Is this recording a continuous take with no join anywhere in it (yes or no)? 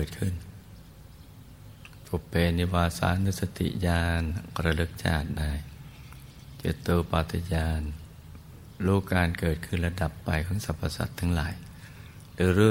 no